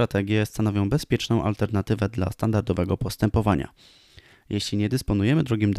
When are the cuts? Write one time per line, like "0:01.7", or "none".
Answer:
none